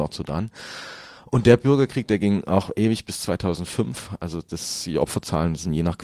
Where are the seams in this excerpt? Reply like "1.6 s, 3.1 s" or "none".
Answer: none